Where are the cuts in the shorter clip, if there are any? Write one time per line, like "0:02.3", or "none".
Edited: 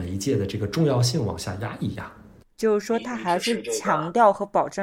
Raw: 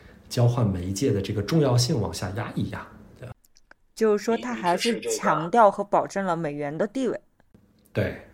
0:02.4